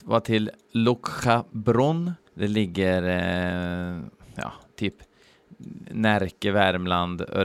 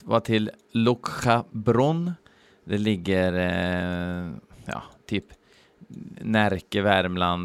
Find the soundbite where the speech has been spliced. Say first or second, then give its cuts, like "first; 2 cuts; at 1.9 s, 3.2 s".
first; 1 cut; at 2.2 s